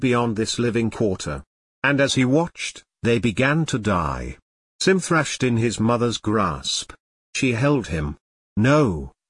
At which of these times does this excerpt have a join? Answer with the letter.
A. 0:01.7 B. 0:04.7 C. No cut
B